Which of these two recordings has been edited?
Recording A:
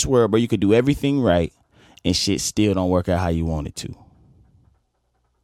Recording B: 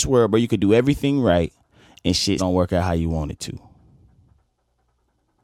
B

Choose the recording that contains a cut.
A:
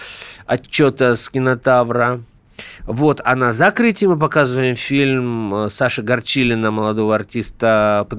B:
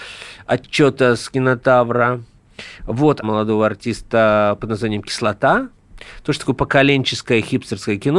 B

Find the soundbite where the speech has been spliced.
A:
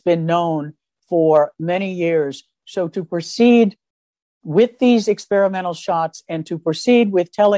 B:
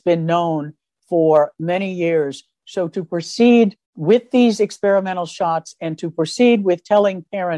B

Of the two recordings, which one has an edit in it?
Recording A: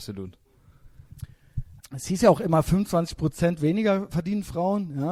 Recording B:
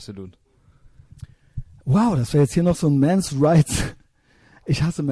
A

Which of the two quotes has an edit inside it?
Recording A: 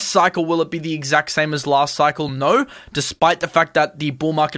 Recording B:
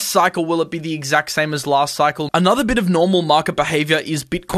B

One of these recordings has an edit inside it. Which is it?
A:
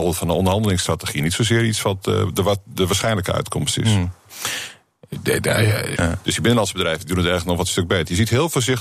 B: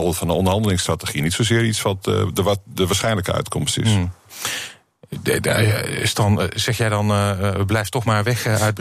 A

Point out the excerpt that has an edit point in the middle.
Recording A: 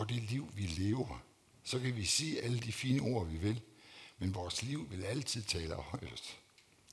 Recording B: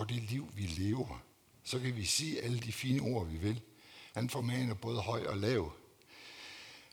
B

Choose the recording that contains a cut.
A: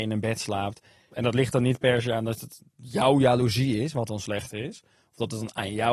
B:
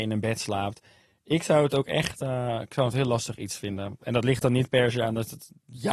A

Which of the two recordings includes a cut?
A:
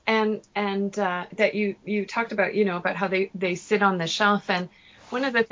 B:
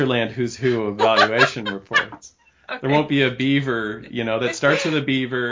A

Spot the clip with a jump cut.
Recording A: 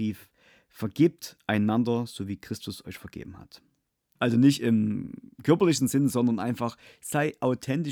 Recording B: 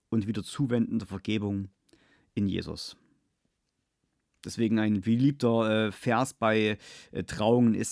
A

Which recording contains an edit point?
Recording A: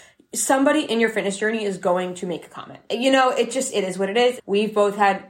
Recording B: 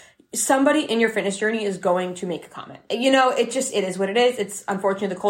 A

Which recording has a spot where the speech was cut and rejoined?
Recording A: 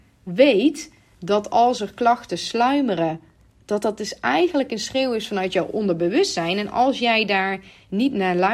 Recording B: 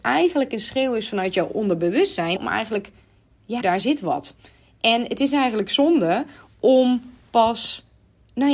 B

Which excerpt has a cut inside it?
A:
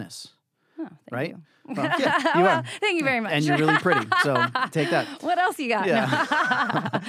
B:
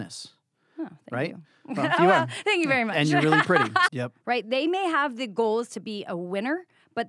B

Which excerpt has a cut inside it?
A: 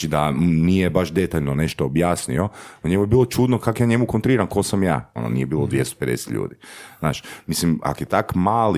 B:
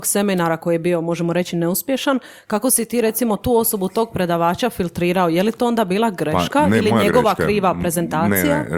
A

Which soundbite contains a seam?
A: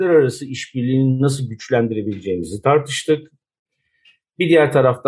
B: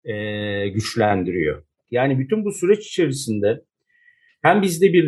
B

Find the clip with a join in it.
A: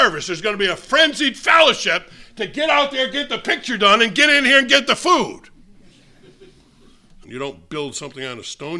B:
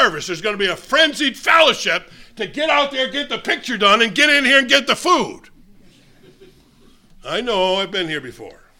A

